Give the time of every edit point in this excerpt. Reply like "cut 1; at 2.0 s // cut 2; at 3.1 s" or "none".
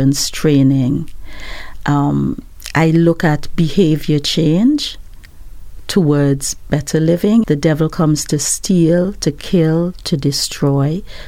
cut 1; at 7.4 s